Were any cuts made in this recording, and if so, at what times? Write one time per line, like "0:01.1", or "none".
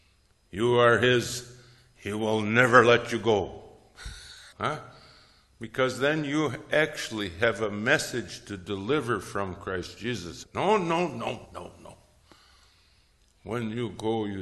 0:04.5
0:10.4
0:11.5